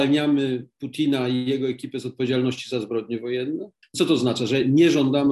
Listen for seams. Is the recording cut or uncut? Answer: cut